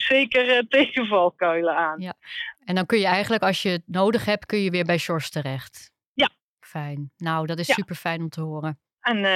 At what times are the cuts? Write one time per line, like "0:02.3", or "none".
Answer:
none